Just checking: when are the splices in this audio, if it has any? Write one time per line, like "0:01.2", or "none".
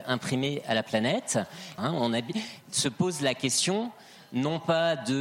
0:01.8